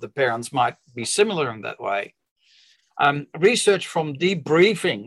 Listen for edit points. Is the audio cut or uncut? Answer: uncut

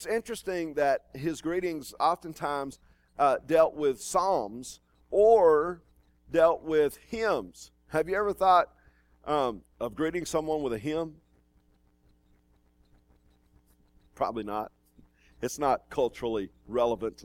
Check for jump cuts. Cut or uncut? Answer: uncut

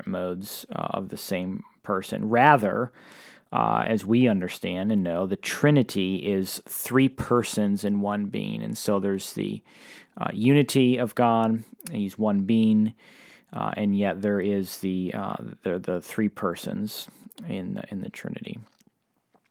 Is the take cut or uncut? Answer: uncut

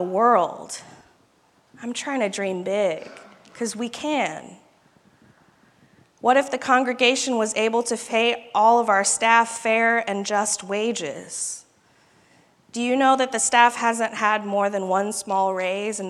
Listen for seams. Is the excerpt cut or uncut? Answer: uncut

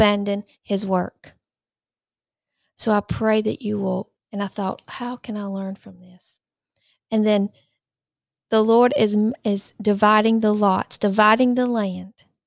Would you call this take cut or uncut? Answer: cut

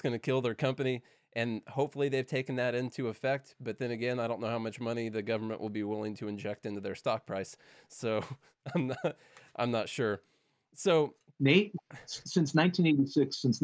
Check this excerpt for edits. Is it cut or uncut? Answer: uncut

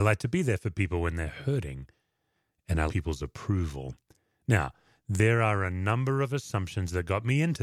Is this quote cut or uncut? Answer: cut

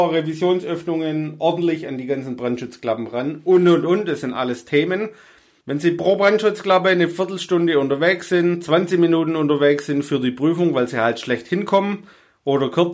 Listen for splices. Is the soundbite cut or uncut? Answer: uncut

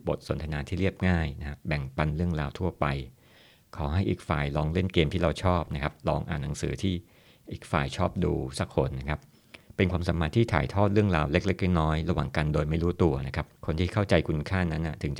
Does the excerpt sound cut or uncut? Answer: cut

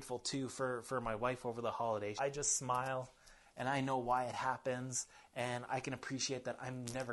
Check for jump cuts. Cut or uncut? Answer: cut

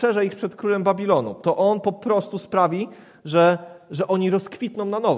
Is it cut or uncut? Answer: uncut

